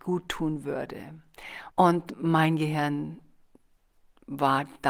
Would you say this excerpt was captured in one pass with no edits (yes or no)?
no